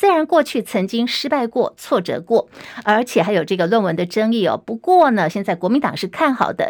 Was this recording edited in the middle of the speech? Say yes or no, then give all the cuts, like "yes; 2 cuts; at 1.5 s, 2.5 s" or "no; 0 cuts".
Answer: yes; 1 cut; at 5.3 s